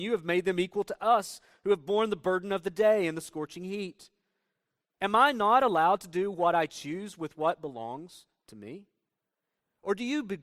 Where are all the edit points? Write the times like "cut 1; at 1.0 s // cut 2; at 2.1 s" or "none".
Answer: cut 1; at 4.9 s